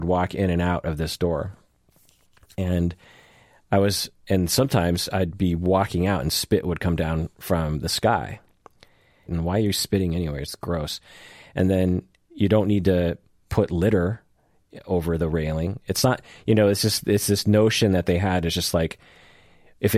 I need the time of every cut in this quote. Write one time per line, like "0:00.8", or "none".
0:09.3